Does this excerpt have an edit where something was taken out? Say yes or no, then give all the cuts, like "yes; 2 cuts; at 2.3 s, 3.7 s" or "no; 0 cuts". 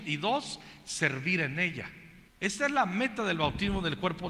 yes; 1 cut; at 2.3 s